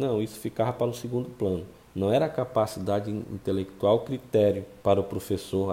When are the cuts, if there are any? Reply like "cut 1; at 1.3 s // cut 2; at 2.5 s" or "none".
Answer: cut 1; at 4.8 s

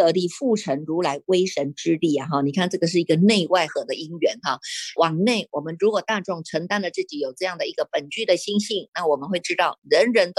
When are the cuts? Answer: cut 1; at 3.7 s // cut 2; at 5.0 s

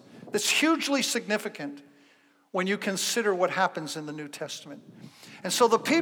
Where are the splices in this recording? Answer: none

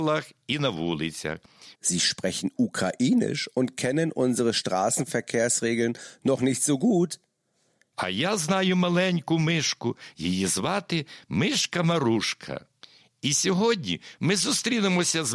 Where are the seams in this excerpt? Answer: cut 1; at 1.7 s // cut 2; at 7.9 s // cut 3; at 10.1 s

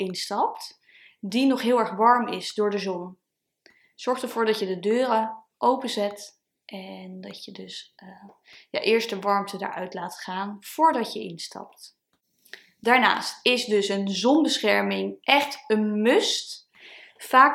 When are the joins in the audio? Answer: none

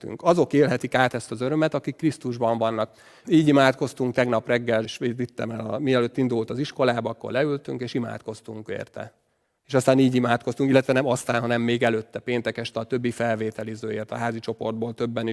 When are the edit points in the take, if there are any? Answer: cut 1; at 3.2 s // cut 2; at 4.8 s // cut 3; at 9.6 s

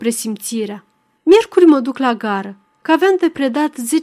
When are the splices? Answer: cut 1; at 1.2 s

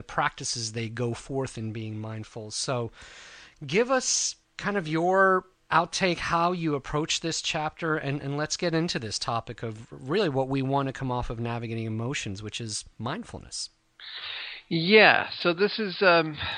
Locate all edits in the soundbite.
cut 1; at 4.4 s

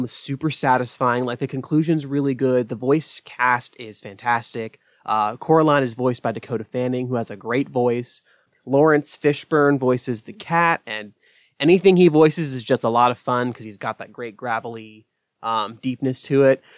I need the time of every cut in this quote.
none

